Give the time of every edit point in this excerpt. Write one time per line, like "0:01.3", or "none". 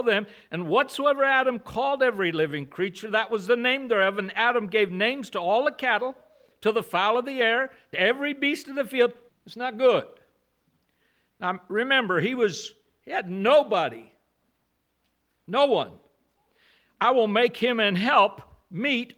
0:09.3